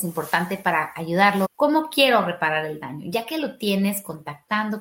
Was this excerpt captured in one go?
no; 1 cut; at 1.4 s

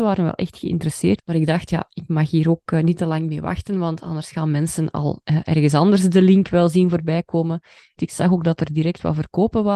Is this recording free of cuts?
no; 2 cuts; at 1.2 s, 8.0 s

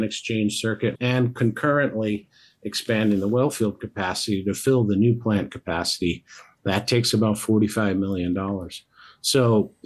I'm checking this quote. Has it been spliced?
yes; 1 cut; at 1.0 s

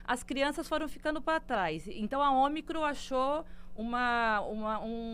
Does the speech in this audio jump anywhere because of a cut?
no; 0 cuts

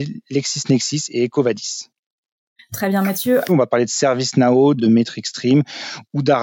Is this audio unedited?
no; 2 cuts; at 3.5 s, 4.8 s

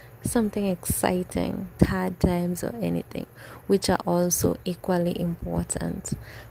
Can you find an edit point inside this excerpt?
yes; 1 cut; at 1.8 s

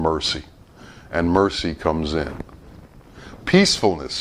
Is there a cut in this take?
no; 0 cuts

